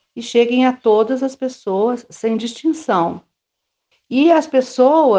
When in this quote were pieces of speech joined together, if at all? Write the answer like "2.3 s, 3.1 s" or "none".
3.9 s